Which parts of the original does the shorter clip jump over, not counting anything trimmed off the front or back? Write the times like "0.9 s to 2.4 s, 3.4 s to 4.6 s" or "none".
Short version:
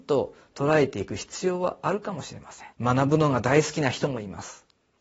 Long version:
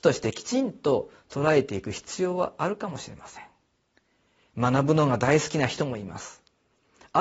3.5 s to 4.5 s